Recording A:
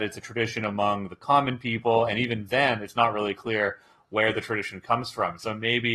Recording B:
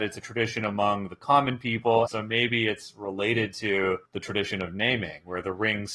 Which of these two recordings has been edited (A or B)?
B